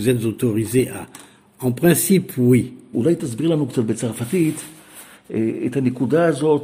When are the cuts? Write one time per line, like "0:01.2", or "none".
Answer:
0:02.9